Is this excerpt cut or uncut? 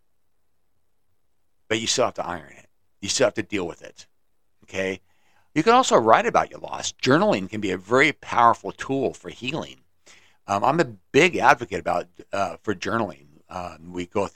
cut